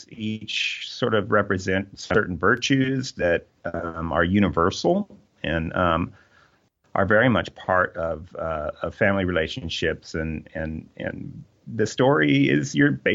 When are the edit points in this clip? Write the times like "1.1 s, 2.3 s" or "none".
none